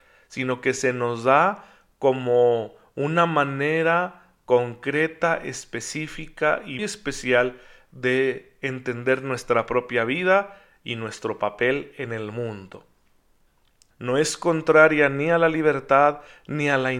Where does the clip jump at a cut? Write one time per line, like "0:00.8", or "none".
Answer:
0:06.8
0:13.9